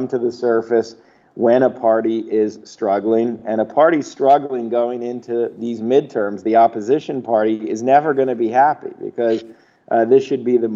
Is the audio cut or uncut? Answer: uncut